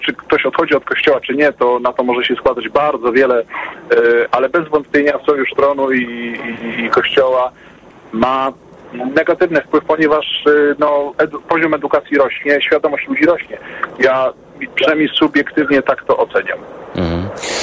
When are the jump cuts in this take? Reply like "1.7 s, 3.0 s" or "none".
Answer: 4.3 s